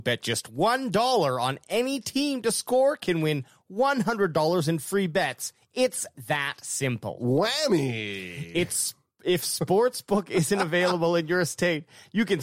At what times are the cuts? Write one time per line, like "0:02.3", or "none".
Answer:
none